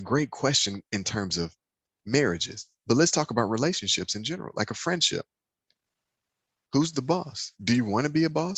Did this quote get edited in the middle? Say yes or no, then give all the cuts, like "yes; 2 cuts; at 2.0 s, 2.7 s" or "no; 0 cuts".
no; 0 cuts